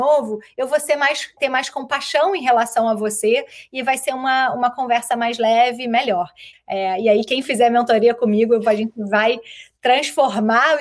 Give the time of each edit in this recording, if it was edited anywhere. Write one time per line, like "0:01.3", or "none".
0:01.4
0:06.5